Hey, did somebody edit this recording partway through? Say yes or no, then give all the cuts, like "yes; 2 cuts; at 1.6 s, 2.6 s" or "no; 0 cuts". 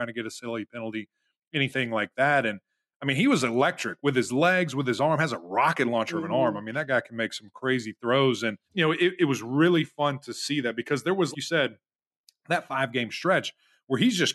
yes; 2 cuts; at 8.7 s, 11.3 s